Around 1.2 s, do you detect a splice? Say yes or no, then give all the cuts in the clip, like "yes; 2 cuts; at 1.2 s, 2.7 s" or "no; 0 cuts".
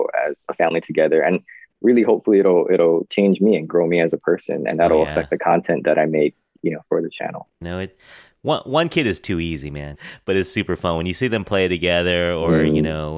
no; 2 cuts; at 7.6 s, 10.0 s